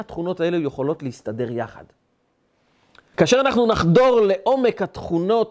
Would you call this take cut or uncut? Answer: cut